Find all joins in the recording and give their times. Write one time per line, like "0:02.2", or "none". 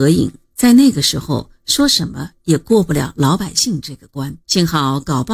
0:04.4